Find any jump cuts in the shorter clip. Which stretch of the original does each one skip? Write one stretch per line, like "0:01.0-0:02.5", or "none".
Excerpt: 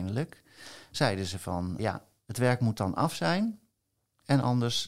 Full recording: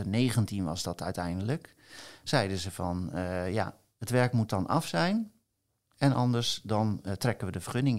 0:03.1-0:03.5